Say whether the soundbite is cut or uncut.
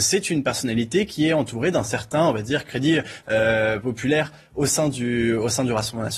uncut